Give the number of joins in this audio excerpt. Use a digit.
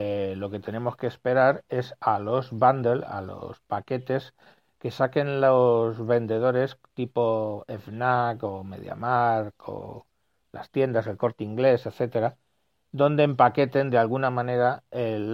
0